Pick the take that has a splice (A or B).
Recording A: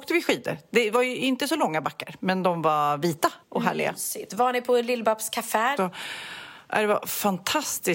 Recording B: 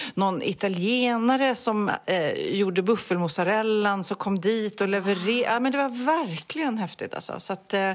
A